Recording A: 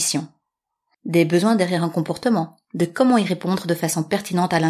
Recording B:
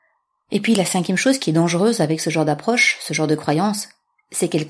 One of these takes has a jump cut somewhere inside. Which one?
A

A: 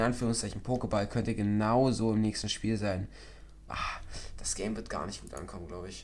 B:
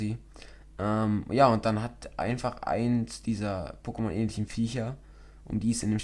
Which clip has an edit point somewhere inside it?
A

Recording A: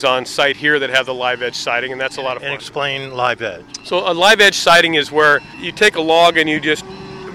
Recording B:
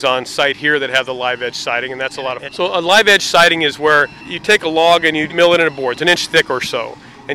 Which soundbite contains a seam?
B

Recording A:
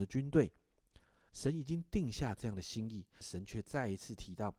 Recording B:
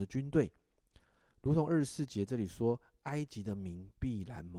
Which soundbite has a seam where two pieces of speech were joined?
A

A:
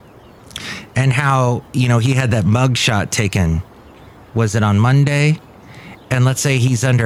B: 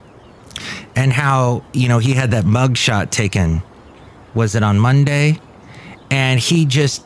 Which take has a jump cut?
A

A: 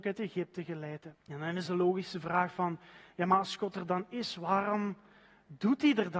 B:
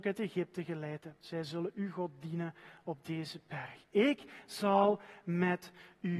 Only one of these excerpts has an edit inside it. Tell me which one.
A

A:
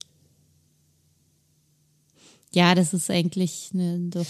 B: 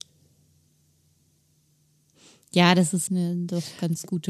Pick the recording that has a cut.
B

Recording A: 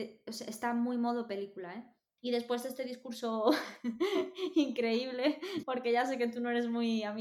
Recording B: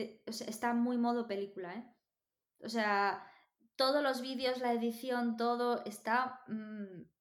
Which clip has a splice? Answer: A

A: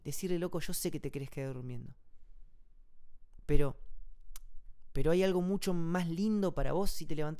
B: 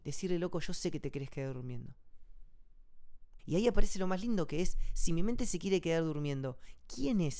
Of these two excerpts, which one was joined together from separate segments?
B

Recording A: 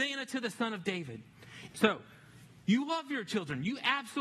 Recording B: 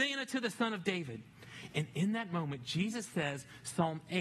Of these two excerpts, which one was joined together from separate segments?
A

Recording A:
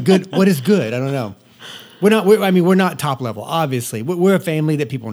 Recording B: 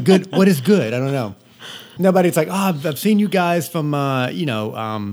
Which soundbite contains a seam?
B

